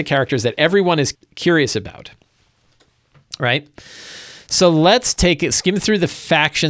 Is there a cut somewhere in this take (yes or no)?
yes